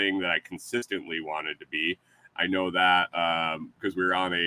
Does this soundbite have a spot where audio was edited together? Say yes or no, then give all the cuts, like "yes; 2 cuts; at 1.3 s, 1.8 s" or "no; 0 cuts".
yes; 1 cut; at 2.3 s